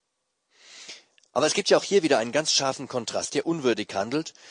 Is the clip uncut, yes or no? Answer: no